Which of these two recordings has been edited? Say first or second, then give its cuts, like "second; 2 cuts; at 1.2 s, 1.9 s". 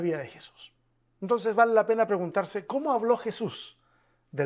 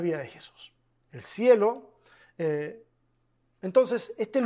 second; 1 cut; at 1.0 s